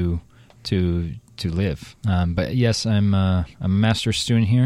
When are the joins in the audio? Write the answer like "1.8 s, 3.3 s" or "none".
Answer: 2.0 s